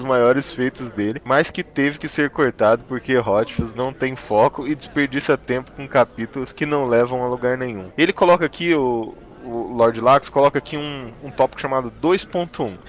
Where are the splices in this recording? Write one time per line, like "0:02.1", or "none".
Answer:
0:07.9